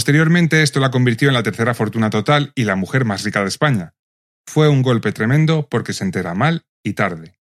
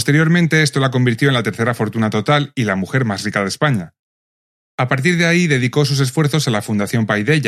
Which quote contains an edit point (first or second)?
first